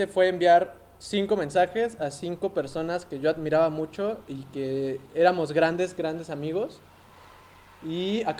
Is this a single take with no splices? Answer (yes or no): yes